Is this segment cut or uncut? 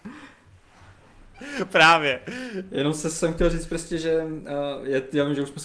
uncut